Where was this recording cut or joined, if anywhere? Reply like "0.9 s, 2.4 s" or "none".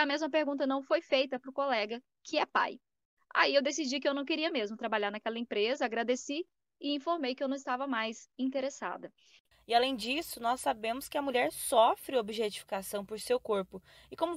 9.5 s

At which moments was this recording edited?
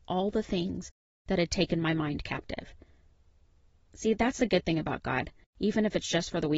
5.4 s

